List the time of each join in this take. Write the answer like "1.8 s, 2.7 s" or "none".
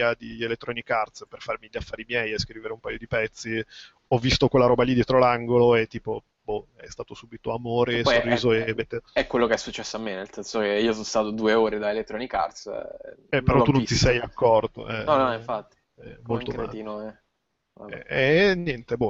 15.1 s